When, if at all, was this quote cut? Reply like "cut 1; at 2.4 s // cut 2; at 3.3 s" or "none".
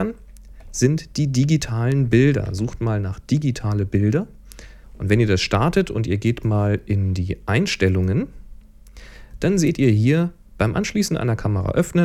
cut 1; at 4.8 s